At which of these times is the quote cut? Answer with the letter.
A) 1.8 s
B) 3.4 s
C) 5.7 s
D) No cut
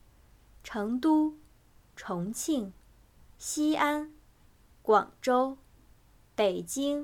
D